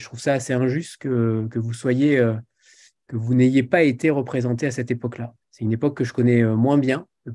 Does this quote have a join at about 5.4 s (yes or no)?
yes